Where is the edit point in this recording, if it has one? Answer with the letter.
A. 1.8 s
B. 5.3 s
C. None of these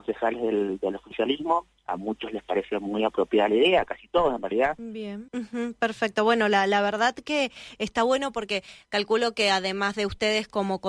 B